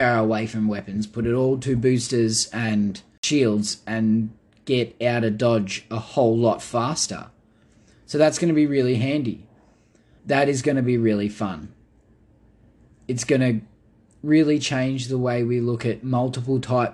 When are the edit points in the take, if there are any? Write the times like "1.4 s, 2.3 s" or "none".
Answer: 10.2 s